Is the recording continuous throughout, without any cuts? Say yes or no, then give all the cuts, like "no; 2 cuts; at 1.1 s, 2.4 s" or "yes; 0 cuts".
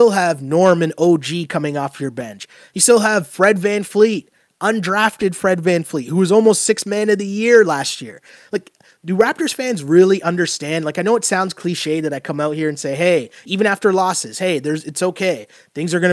yes; 0 cuts